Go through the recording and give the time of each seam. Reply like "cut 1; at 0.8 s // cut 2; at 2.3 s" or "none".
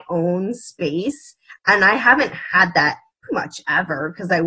cut 1; at 3.3 s